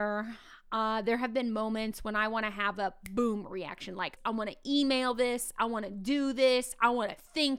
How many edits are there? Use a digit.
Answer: 1